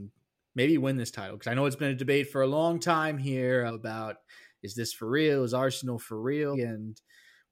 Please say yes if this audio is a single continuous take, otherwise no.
no